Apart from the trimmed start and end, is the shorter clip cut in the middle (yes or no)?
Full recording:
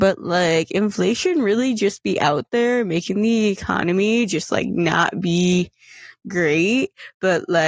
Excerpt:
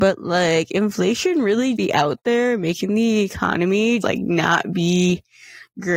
yes